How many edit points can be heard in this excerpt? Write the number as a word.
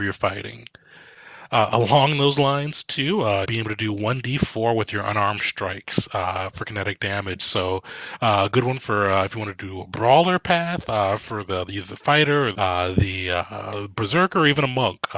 two